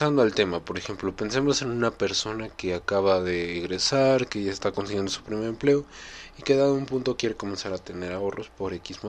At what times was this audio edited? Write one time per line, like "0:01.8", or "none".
none